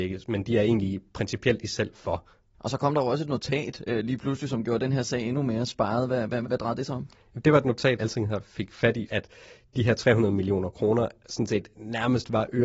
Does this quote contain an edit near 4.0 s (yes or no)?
no